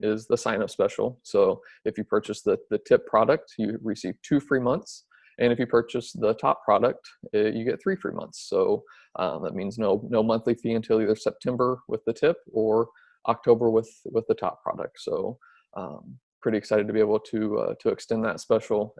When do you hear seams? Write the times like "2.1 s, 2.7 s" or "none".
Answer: none